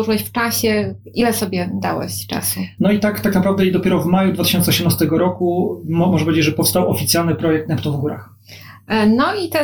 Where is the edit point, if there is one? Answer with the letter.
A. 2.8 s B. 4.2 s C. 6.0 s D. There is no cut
A